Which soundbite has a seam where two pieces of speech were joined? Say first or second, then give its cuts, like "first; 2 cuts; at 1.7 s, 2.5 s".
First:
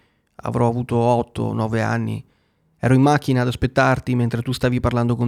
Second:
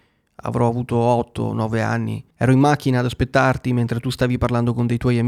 second; 1 cut; at 2.3 s